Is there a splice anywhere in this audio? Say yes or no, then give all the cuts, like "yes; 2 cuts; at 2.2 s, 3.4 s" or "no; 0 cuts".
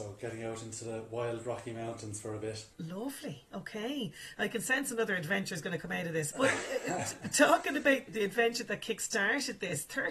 yes; 3 cuts; at 2.7 s, 6.3 s, 8.1 s